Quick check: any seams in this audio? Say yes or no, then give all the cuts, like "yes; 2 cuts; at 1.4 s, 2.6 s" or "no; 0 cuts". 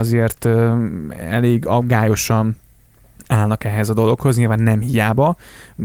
no; 0 cuts